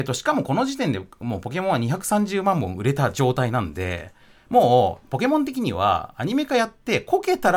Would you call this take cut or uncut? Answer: uncut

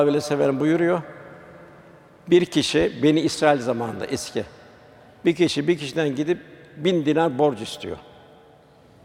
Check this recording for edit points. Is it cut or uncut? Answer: uncut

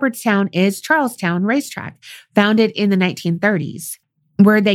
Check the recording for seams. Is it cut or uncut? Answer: uncut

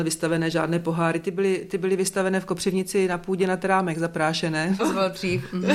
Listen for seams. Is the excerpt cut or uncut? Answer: cut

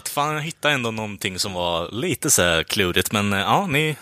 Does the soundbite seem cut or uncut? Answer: uncut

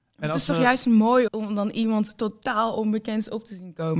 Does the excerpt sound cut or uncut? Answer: cut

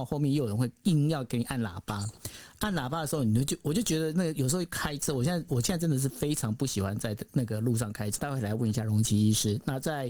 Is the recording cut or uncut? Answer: cut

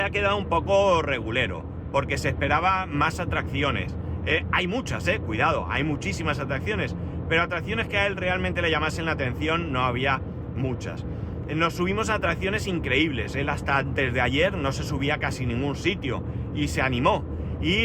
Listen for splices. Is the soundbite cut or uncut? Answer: uncut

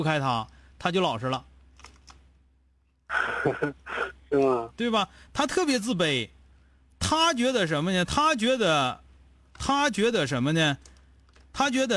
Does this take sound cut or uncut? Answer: uncut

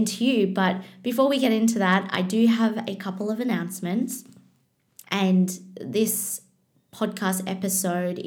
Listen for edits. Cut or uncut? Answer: cut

